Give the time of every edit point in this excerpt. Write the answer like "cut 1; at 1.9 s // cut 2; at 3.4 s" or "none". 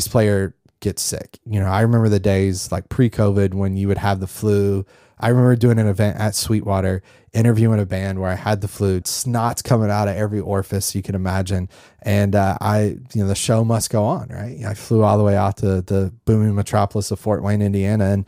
cut 1; at 9.0 s